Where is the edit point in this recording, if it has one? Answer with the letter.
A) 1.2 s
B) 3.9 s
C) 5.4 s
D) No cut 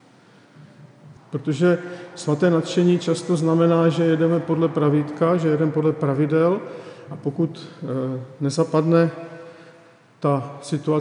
A